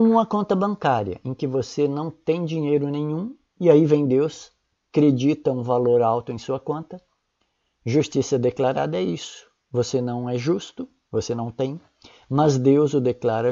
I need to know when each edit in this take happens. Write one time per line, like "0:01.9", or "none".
none